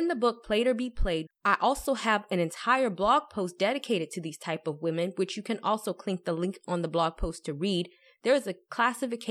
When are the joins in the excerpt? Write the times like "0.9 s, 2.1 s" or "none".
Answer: 1.3 s